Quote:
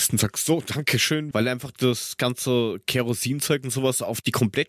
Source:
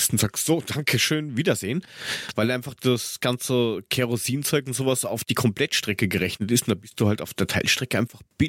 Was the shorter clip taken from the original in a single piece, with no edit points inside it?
no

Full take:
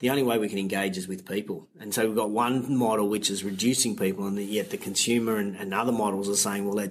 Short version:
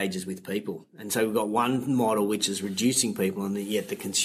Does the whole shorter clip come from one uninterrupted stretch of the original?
yes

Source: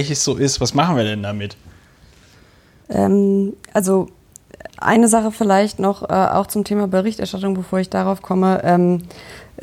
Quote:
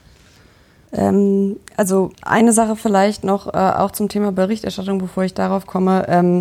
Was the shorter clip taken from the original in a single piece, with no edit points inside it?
no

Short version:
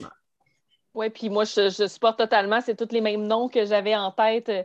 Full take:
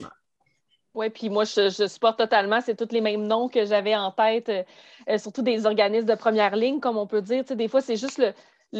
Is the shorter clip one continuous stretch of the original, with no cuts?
yes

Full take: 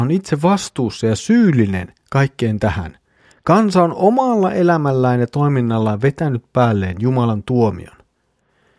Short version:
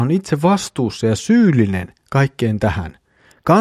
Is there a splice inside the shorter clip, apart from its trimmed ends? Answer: no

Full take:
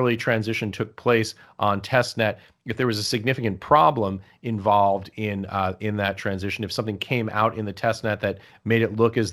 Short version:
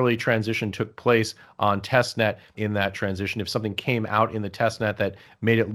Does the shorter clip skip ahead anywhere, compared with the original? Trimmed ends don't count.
yes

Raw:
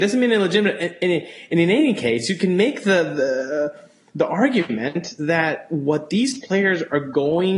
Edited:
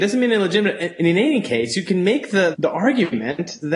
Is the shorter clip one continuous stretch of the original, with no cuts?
no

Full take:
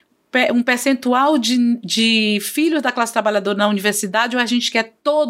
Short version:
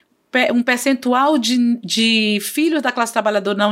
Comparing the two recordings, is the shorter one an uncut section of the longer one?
yes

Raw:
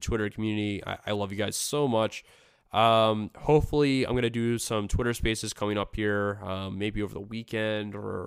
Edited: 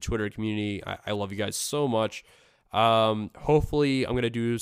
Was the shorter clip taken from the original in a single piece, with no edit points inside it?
yes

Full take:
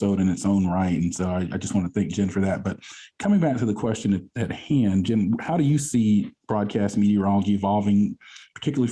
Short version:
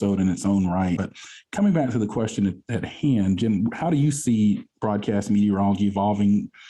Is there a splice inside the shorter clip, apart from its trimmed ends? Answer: yes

